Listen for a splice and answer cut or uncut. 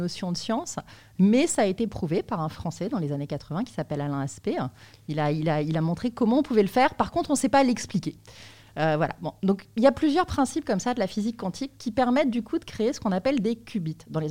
uncut